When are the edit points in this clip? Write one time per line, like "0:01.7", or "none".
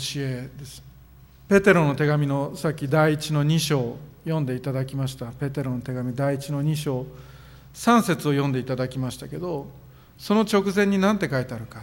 0:01.5